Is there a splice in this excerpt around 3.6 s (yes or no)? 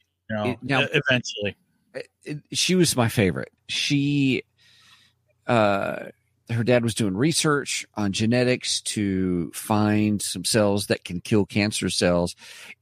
yes